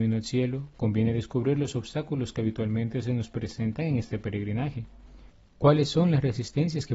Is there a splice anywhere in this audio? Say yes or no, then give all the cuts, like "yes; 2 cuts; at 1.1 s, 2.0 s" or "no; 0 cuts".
no; 0 cuts